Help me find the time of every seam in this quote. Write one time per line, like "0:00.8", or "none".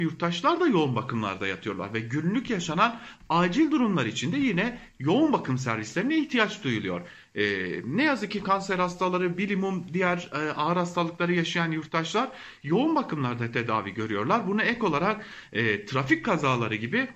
none